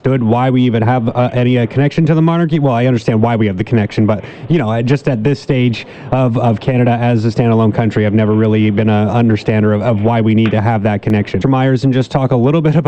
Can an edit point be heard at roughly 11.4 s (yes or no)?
yes